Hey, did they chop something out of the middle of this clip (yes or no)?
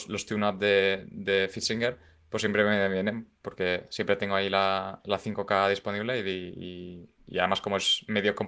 no